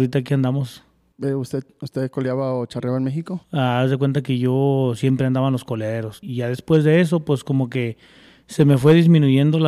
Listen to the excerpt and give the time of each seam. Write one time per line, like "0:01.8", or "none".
0:03.4
0:06.2

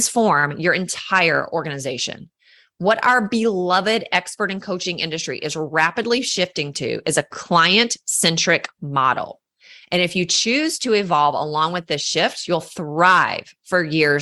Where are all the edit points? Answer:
none

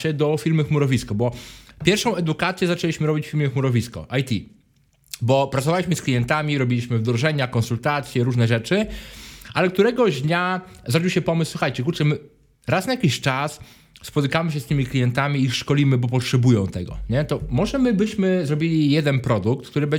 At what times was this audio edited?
none

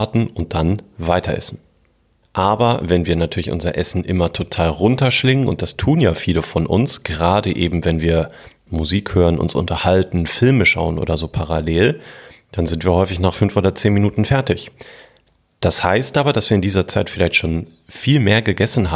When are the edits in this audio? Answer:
0:02.2

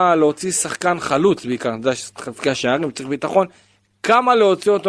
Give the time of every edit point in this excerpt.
none

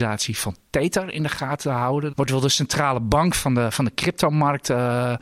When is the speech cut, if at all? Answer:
0:02.1

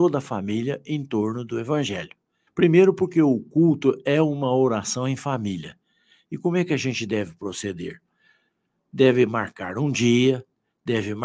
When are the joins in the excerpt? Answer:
0:02.5

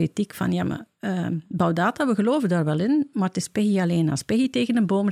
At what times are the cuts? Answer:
none

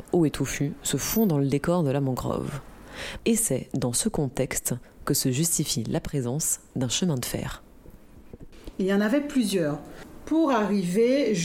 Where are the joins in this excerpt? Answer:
0:03.2

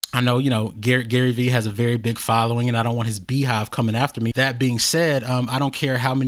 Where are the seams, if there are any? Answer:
0:04.3

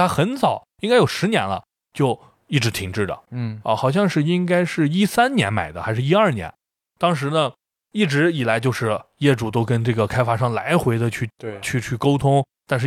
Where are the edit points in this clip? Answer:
none

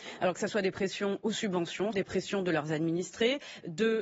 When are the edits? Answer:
0:01.9

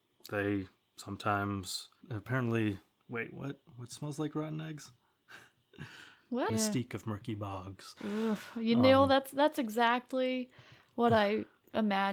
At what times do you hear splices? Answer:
0:02.0
0:06.5

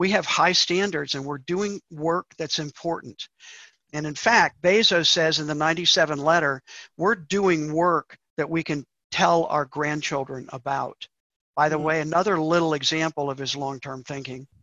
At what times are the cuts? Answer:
none

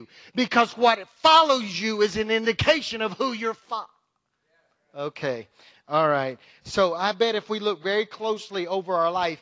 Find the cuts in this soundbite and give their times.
none

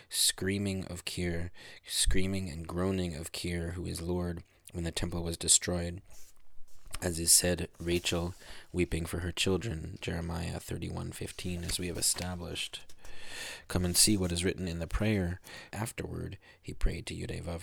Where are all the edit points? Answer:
0:15.7

